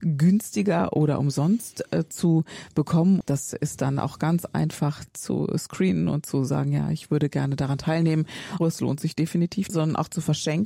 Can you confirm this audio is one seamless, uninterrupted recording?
no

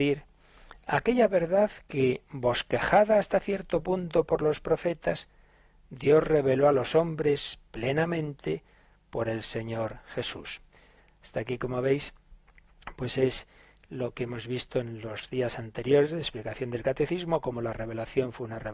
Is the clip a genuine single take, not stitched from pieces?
yes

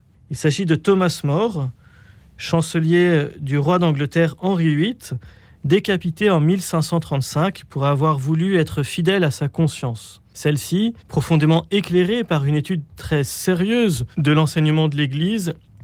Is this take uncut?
no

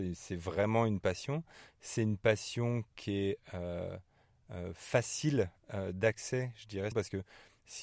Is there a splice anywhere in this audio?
yes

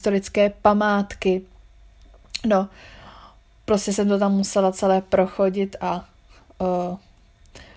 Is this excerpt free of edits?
yes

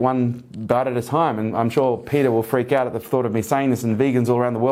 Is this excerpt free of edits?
yes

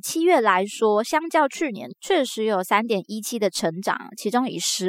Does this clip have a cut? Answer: no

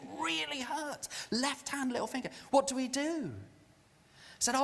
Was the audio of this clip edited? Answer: no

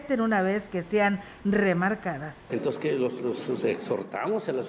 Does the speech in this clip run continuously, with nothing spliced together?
no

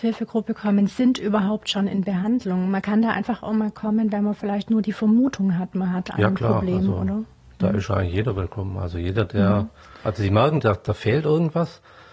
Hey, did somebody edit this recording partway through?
yes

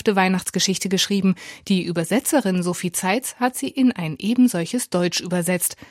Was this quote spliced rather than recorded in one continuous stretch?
no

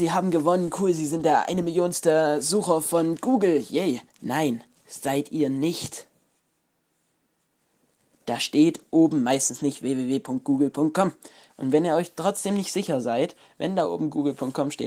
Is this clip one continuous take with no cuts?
no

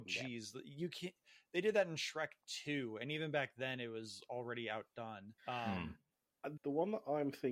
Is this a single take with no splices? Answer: no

